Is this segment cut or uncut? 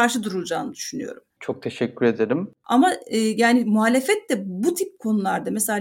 cut